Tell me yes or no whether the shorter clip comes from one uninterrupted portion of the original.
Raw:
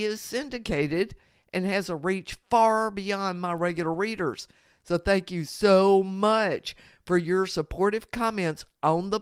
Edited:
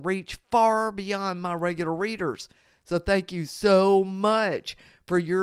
yes